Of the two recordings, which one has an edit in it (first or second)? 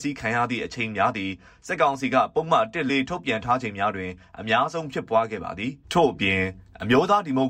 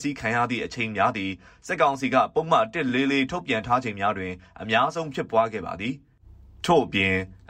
first